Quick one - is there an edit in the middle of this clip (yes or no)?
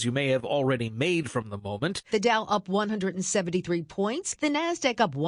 yes